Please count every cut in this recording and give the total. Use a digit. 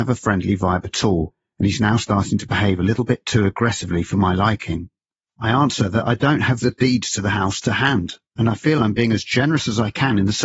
2